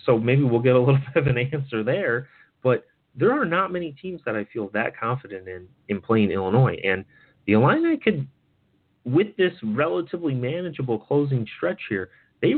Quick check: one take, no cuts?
yes; 0 cuts

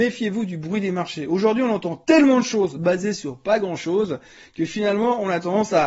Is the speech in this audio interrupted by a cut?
no; 0 cuts

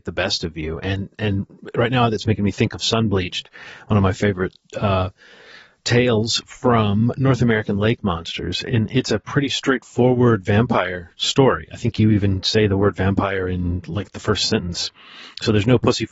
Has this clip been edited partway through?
no; 0 cuts

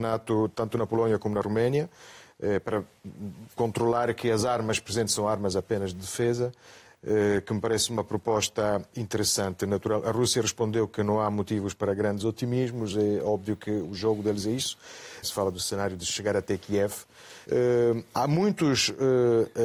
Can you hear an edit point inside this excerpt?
yes; 2 cuts; at 15.2 s, 17.4 s

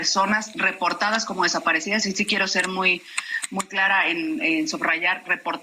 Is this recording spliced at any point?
no; 0 cuts

